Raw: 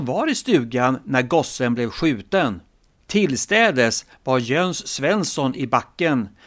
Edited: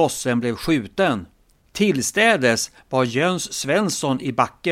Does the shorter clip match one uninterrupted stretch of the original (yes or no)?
yes